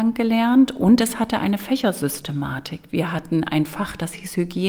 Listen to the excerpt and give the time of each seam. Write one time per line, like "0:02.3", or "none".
0:02.9